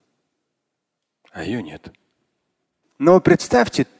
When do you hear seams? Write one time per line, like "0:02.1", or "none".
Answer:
0:02.8

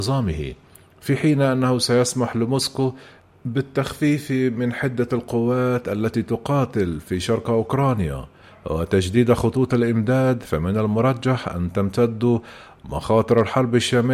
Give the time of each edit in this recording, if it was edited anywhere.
none

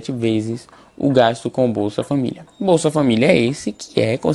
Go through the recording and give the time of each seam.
none

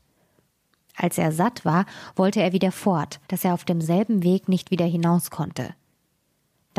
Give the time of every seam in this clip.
0:03.3

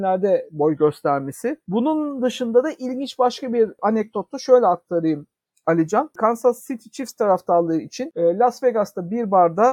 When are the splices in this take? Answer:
none

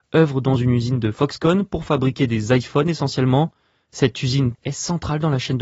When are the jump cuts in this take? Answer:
0:04.5

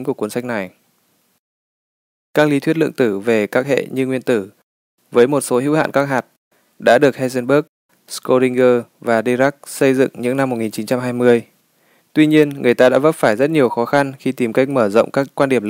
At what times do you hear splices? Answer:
0:12.0

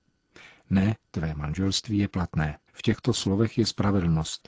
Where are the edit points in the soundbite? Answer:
0:02.7

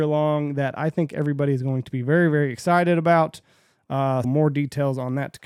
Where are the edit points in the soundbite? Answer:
0:04.2

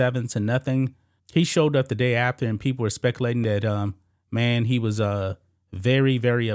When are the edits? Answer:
0:01.2

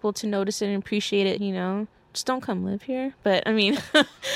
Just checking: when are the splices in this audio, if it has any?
0:01.4

